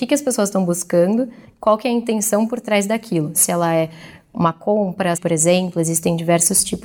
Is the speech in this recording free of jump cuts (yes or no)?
no